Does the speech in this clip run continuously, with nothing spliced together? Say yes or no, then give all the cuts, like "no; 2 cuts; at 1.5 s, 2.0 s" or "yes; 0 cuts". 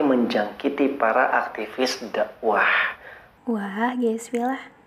no; 1 cut; at 3.4 s